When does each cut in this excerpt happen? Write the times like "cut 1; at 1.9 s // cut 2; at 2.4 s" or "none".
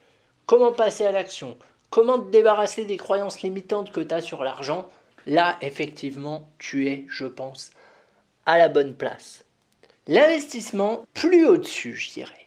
cut 1; at 9.9 s // cut 2; at 11.0 s